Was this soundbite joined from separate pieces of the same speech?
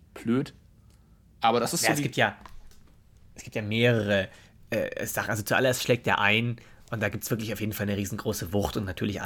no; 0 cuts

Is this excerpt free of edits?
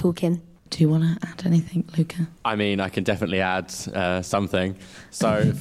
no; 1 cut; at 2.4 s

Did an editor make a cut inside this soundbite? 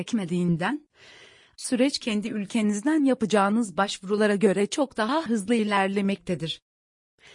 no; 0 cuts

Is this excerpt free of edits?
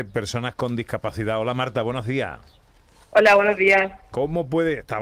yes; 0 cuts

